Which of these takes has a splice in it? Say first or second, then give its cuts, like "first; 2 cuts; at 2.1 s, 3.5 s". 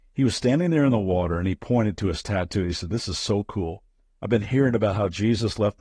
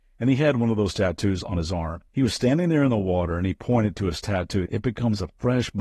second; 2 cuts; at 2.1 s, 4.7 s